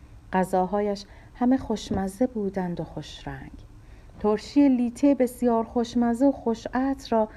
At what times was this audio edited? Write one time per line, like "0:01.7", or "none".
0:04.1